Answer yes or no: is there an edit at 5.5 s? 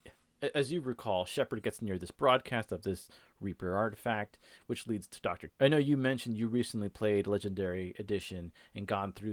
yes